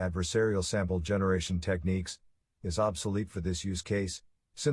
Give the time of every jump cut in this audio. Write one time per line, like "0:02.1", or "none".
0:02.6